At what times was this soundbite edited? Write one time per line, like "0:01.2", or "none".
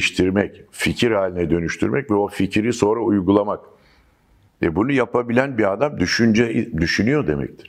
0:04.5